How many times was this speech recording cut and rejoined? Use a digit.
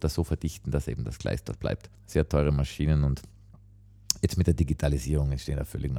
1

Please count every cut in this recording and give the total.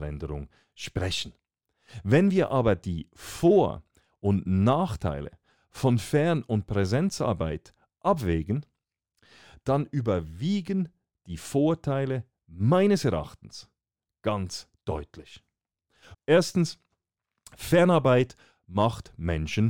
1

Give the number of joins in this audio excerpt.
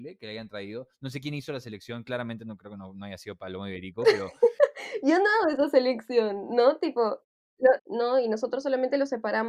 1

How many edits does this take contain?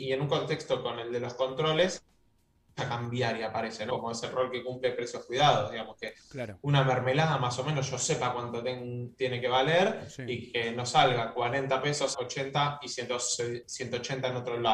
2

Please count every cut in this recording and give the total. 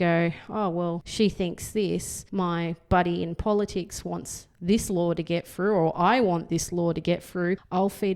0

